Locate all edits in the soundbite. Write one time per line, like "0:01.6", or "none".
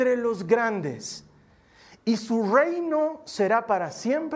none